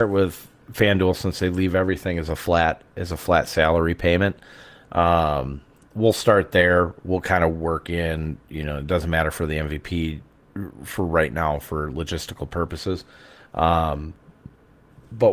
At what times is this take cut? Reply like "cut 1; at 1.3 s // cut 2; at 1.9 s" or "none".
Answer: none